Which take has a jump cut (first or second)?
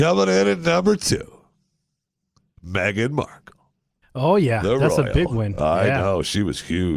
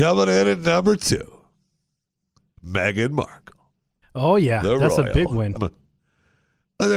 second